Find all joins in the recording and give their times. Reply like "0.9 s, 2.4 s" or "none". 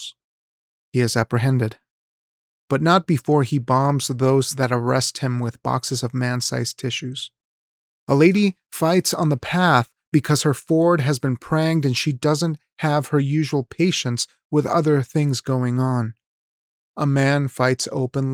7.9 s